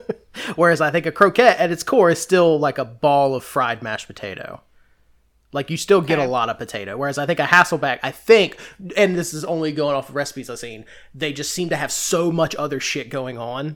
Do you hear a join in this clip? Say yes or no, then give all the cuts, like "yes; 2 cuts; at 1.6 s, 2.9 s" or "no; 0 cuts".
no; 0 cuts